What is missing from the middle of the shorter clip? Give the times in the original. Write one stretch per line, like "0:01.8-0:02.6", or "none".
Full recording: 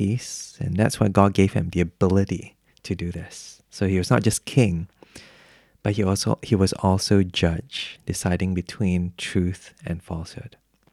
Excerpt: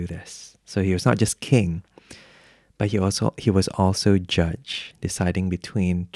none